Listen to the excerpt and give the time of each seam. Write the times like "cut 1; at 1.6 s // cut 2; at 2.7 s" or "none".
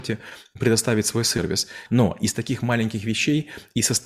cut 1; at 1.9 s